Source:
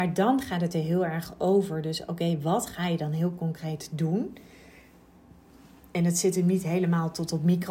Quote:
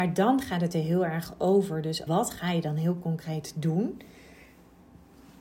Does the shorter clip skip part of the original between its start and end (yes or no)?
yes